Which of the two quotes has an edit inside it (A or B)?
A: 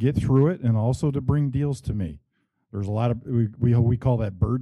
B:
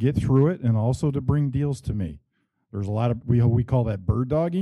B